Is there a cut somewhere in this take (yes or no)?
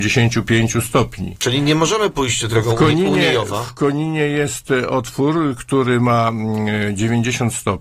no